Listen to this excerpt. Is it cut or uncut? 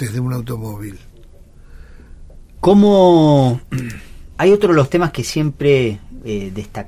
cut